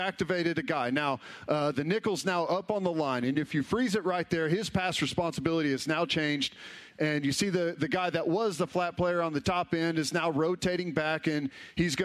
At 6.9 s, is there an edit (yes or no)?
yes